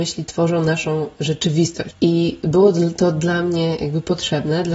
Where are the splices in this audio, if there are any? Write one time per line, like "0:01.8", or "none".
0:01.9